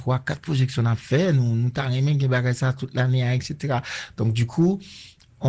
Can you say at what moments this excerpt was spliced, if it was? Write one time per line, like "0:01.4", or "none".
none